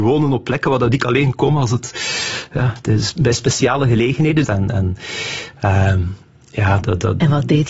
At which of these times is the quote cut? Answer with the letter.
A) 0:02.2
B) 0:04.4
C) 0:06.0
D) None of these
B